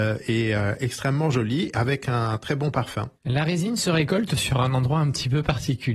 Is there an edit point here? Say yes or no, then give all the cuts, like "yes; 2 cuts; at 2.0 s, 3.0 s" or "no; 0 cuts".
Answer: yes; 1 cut; at 3.2 s